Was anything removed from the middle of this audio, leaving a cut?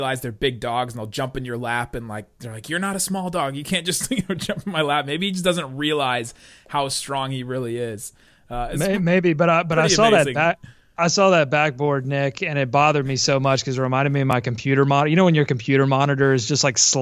no; 0 cuts

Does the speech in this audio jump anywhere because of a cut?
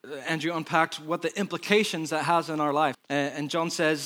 yes; 1 cut; at 2.9 s

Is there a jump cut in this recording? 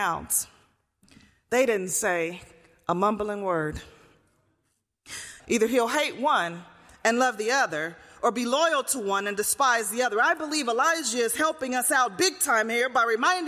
yes; 1 cut; at 5.4 s

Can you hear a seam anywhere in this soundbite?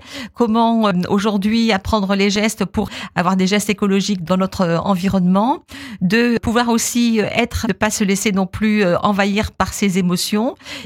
yes; 1 cut; at 7.6 s

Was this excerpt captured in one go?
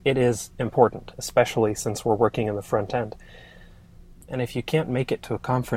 no; 2 cuts; at 1.1 s, 4.3 s

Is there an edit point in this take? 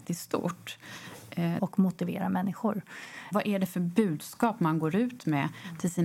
yes; 2 cuts; at 1.6 s, 3.3 s

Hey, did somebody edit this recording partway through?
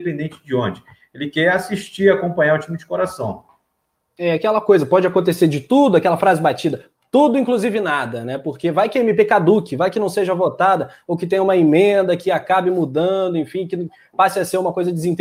no; 0 cuts

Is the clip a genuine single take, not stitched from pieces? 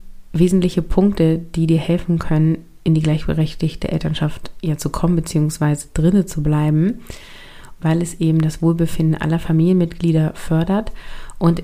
no; 1 cut; at 7.8 s

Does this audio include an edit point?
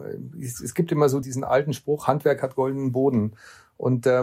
yes; 1 cut; at 1.2 s

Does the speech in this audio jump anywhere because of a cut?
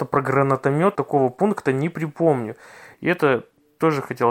yes; 2 cuts; at 1.0 s, 2.9 s

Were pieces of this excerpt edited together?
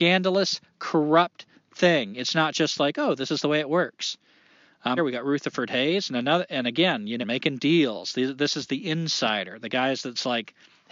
yes; 2 cuts; at 5.0 s, 7.2 s

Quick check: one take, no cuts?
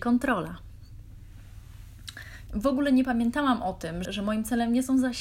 no; 2 cuts; at 2.5 s, 4.0 s

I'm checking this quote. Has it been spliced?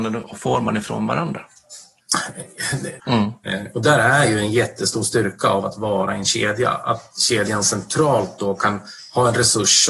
yes; 1 cut; at 3.0 s

